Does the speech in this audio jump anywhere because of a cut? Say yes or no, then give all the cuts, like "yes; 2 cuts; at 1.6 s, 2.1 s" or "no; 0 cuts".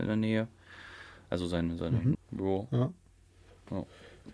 yes; 1 cut; at 2.1 s